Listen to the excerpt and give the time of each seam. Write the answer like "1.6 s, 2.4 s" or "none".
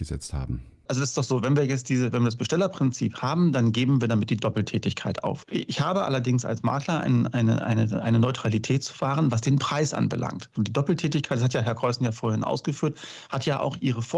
5.4 s, 10.6 s